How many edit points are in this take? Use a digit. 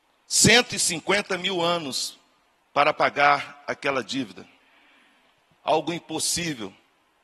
0